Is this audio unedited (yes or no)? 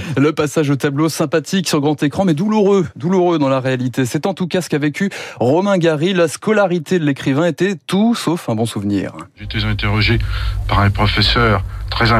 yes